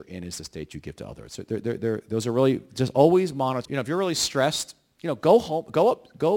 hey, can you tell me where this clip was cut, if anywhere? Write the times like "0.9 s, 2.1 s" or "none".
3.6 s